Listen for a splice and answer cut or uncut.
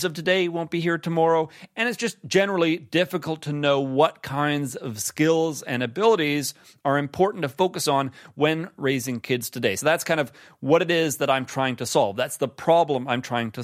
uncut